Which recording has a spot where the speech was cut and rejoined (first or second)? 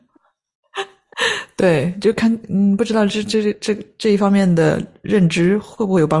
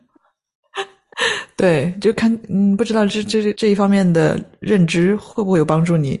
second